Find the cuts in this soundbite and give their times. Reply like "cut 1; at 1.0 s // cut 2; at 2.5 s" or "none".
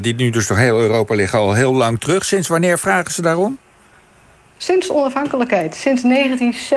none